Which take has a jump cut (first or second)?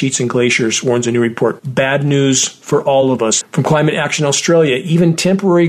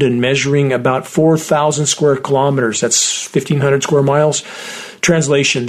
first